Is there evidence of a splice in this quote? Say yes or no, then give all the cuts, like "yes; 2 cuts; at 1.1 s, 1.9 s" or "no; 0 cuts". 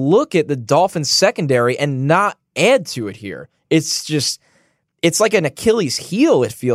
no; 0 cuts